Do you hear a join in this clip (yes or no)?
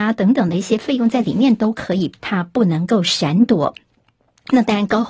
yes